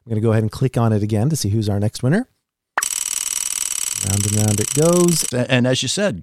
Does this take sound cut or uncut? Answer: cut